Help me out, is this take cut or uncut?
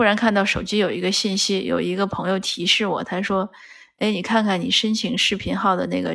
uncut